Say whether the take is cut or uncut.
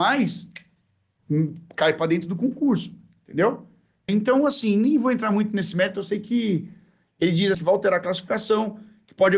cut